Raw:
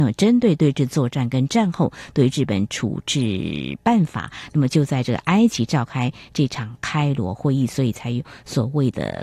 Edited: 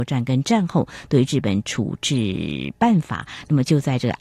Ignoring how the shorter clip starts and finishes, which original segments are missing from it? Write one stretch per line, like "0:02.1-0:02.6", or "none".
none